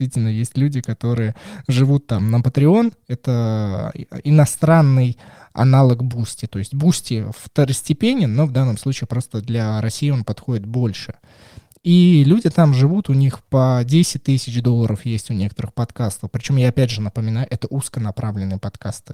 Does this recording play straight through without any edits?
yes; 0 cuts

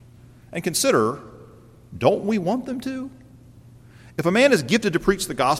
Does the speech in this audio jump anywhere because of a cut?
no; 0 cuts

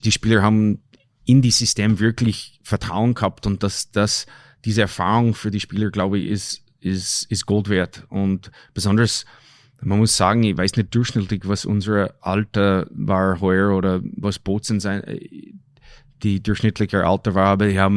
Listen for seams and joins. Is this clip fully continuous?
yes; 0 cuts

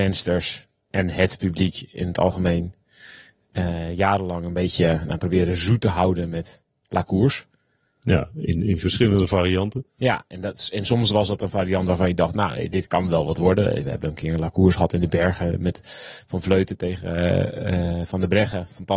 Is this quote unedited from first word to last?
yes; 0 cuts

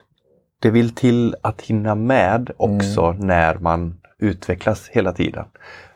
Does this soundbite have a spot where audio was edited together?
no; 0 cuts

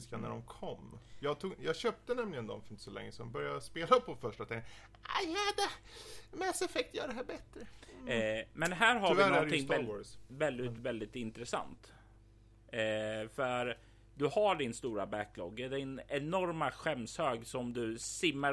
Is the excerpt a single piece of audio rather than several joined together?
yes; 0 cuts

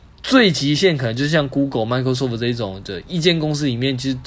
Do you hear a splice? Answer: no; 0 cuts

